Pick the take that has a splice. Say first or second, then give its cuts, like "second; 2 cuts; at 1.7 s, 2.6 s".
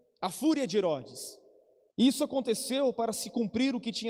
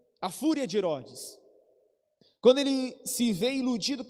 first; 1 cut; at 1.9 s